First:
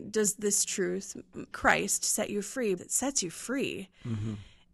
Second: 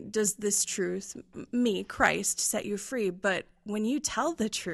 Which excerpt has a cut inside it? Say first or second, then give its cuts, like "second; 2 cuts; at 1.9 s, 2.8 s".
first; 2 cuts; at 1.5 s, 2.8 s